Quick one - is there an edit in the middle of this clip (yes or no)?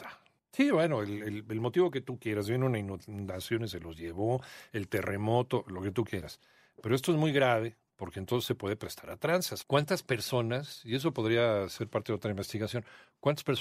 no